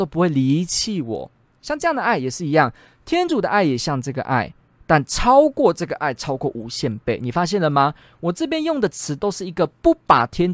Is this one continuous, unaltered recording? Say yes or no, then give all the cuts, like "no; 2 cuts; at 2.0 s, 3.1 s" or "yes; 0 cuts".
yes; 0 cuts